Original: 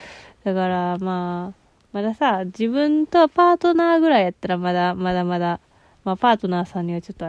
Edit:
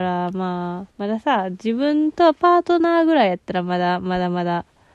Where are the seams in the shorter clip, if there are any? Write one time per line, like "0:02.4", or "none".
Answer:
0:00.9

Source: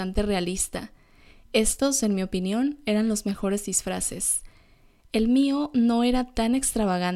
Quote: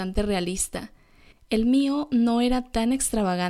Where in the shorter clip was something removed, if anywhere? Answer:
0:01.3

